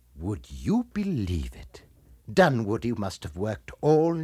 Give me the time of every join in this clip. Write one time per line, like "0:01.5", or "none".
0:02.2